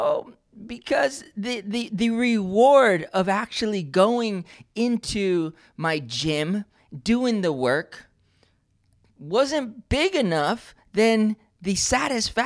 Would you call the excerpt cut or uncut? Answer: uncut